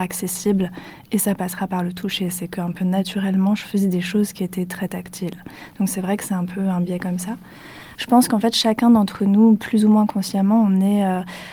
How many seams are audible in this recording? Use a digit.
1